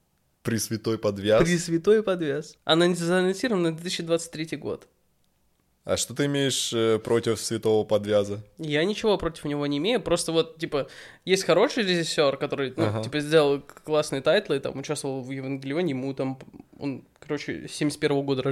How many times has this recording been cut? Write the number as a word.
one